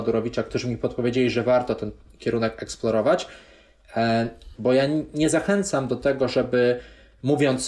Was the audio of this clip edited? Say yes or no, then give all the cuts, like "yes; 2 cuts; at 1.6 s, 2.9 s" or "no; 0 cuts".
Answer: yes; 1 cut; at 4.5 s